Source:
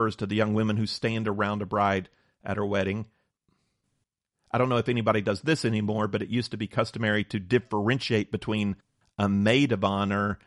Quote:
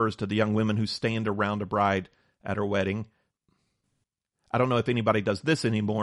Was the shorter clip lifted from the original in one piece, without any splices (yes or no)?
yes